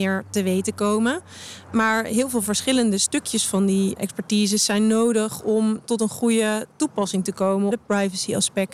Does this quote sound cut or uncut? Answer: cut